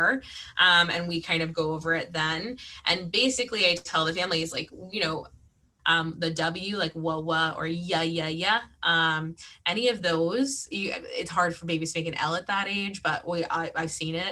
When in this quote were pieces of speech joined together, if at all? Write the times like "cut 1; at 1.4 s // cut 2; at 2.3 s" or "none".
cut 1; at 5.8 s

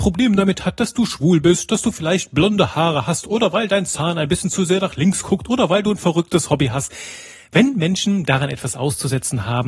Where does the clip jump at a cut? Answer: none

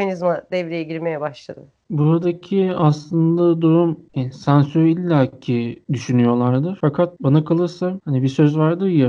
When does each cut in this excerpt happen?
none

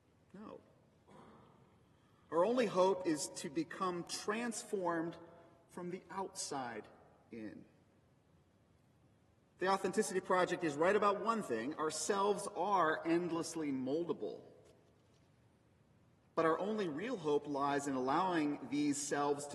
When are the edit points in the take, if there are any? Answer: none

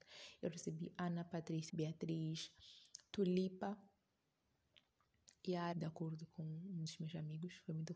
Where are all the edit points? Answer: cut 1; at 1.7 s // cut 2; at 5.7 s

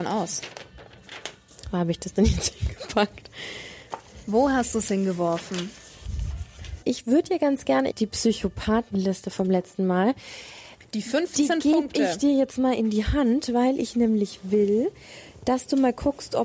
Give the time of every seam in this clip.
cut 1; at 6.8 s // cut 2; at 7.9 s

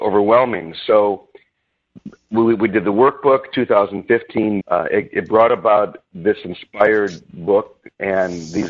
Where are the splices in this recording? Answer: cut 1; at 4.6 s

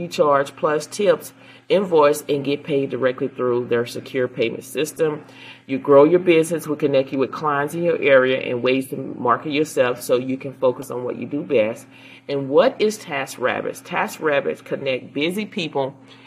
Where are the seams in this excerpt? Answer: none

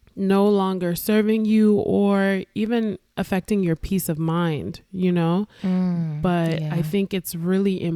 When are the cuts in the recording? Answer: cut 1; at 5.6 s

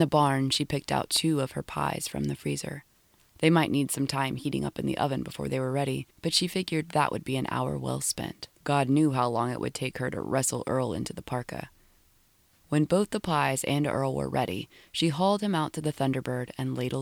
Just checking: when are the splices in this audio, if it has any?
none

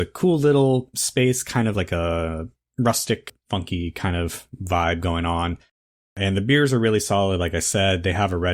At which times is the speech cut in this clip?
none

